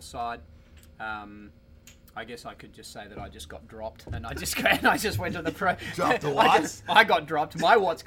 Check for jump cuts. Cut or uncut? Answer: uncut